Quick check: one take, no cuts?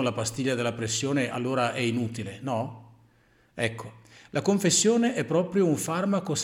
yes; 0 cuts

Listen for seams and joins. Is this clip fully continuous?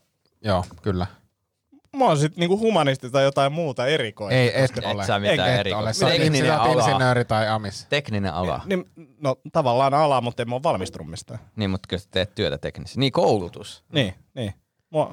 yes; 0 cuts

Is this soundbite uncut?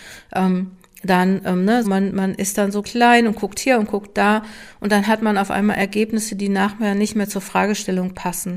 no; 2 cuts; at 1.8 s, 2.8 s

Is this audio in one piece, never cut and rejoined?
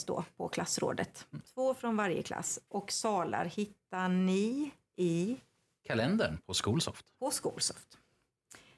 no; 1 cut; at 1.4 s

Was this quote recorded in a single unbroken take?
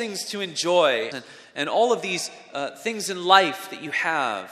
no; 1 cut; at 1.1 s

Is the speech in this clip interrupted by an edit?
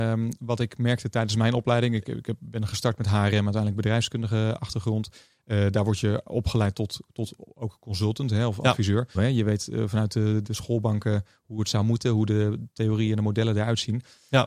yes; 2 cuts; at 9.1 s, 10.4 s

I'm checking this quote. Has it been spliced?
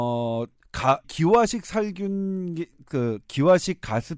yes; 1 cut; at 1.0 s

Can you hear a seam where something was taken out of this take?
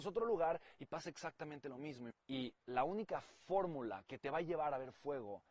yes; 1 cut; at 2.1 s

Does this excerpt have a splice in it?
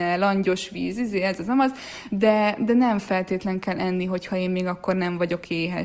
no; 0 cuts

